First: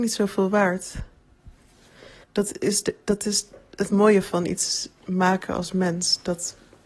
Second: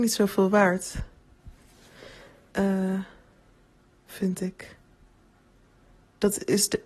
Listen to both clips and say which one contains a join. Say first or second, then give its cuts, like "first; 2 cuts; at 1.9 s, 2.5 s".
first; 1 cut; at 2.2 s